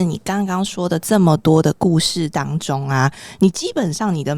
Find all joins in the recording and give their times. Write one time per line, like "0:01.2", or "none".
none